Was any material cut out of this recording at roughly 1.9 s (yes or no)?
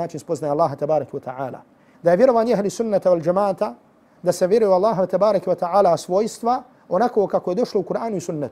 yes